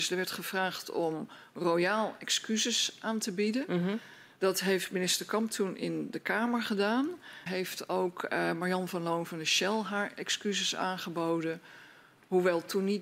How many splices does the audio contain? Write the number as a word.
one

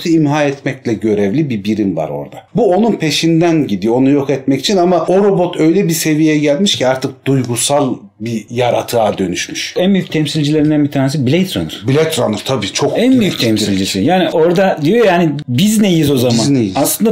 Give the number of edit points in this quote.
zero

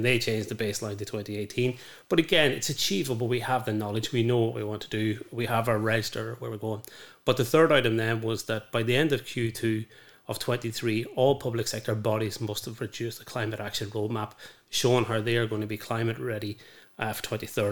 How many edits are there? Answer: zero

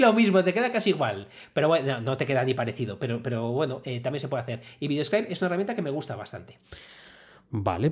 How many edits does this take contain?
zero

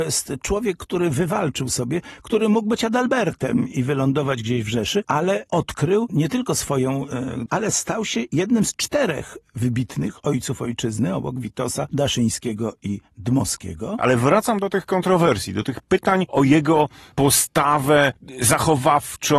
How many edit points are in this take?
three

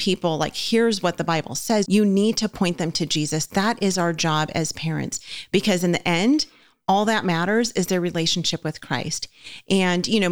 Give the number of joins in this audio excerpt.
one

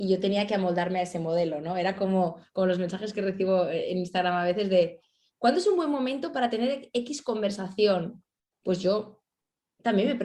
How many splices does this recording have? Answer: zero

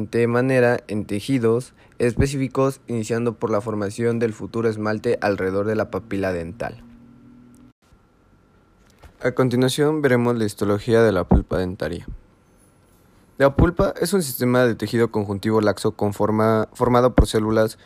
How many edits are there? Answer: zero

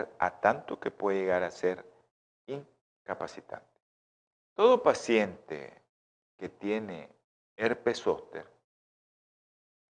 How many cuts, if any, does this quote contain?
one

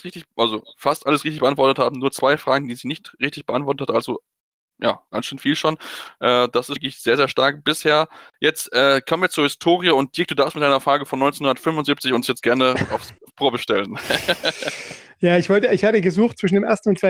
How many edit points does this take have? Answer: one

